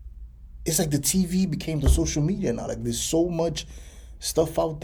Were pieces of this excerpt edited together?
no; 0 cuts

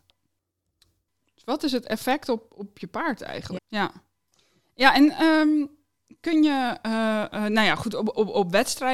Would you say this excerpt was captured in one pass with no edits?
no; 1 cut; at 3.6 s

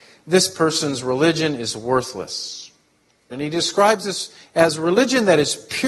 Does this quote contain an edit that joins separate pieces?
yes; 1 cut; at 3.3 s

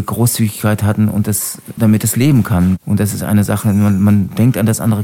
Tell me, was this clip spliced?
yes; 1 cut; at 1.8 s

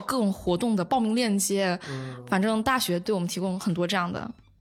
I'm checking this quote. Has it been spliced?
no; 0 cuts

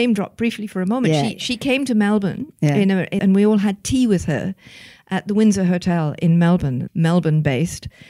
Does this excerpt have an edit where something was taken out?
yes; 2 cuts; at 3.2 s, 6.9 s

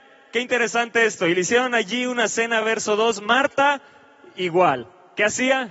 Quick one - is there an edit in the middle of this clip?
no; 0 cuts

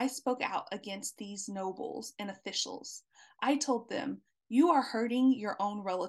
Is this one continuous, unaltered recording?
yes; 0 cuts

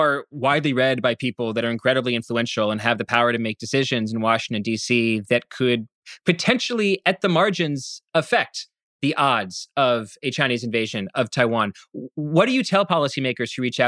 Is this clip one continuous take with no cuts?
yes; 0 cuts

